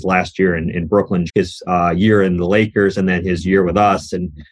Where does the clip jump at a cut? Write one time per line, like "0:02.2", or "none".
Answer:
0:01.3